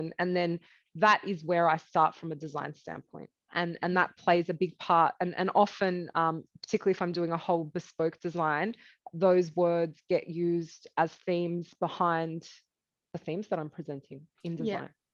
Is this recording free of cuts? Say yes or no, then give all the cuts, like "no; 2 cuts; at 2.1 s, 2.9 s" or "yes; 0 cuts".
no; 1 cut; at 3.5 s